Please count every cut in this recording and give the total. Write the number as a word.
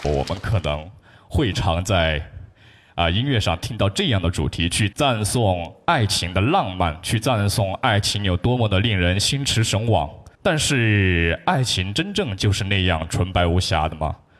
two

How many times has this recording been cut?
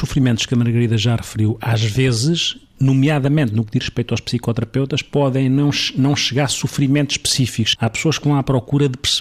one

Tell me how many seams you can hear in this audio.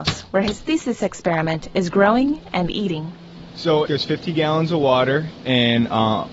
one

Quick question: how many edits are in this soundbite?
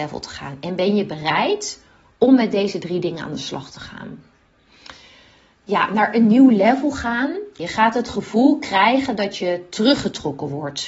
one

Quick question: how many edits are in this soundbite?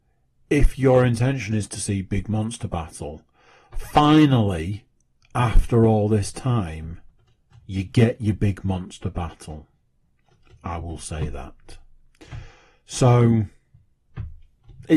zero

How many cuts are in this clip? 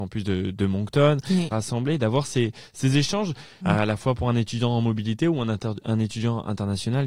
two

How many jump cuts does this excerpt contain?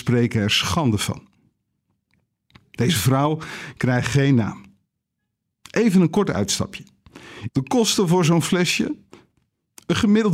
one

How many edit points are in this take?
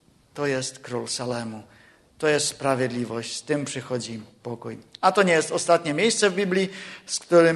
zero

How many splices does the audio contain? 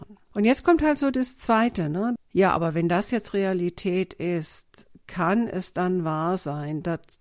one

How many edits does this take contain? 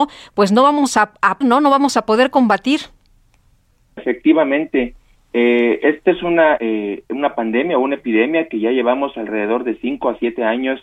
three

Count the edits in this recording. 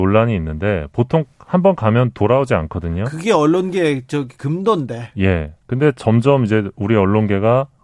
one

